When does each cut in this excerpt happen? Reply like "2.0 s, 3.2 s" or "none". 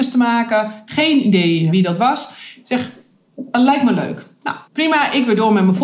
4.7 s